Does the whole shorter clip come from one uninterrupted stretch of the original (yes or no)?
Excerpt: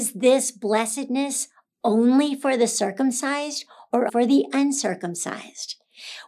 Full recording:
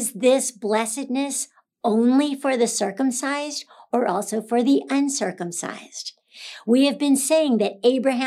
no